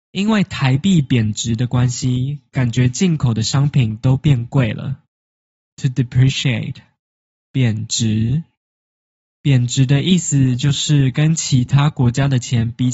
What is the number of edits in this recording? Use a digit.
1